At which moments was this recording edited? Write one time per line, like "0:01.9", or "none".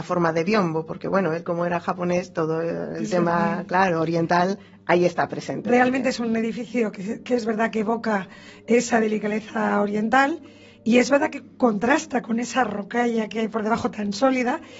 none